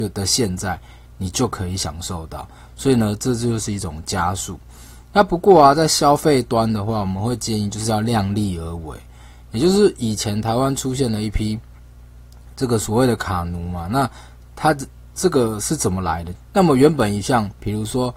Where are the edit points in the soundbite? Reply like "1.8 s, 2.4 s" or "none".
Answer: 16.3 s